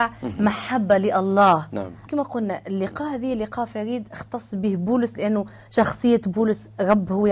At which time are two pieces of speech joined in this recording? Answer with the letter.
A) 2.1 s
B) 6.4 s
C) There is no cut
A